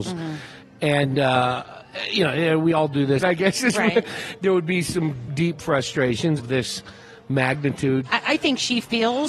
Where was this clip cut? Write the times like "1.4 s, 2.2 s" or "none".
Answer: 3.2 s, 5.3 s, 6.4 s